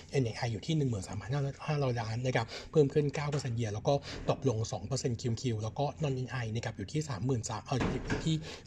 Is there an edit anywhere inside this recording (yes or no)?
no